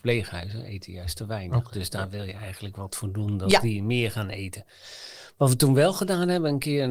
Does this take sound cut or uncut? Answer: uncut